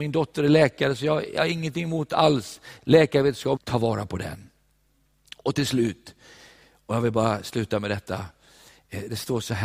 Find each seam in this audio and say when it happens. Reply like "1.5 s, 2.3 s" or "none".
3.6 s